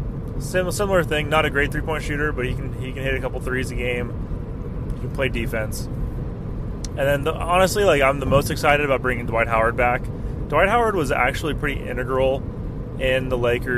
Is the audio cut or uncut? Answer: uncut